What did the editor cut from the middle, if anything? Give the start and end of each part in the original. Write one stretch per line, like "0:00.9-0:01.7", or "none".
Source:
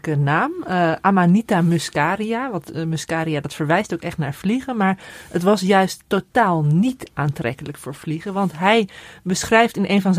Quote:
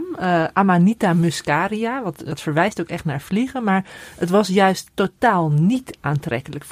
0:02.8-0:03.4